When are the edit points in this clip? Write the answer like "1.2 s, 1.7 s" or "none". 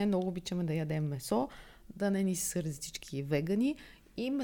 none